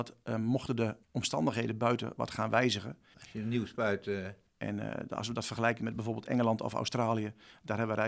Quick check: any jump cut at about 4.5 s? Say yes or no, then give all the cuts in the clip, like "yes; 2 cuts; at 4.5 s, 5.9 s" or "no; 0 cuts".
yes; 3 cuts; at 1.0 s, 3.1 s, 4.5 s